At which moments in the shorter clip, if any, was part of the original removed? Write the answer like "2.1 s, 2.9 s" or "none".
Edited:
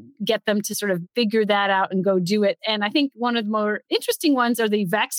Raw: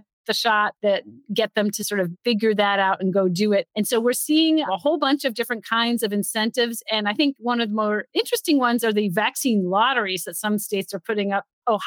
2.6 s

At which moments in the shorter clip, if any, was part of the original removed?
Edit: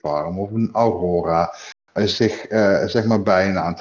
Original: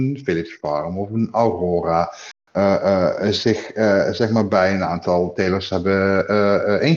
2.0 s

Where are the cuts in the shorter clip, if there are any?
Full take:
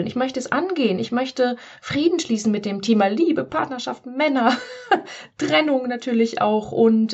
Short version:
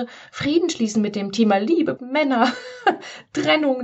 2.0 s

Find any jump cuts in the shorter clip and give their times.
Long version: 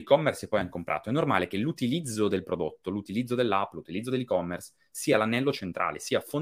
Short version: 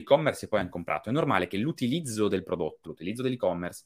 2.8 s

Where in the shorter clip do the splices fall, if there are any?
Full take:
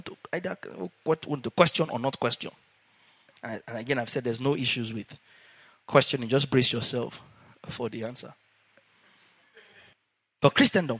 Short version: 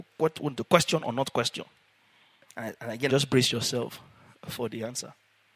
3.1 s

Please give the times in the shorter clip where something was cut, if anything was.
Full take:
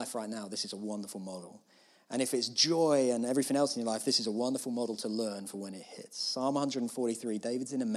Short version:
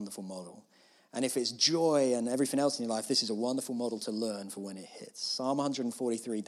none

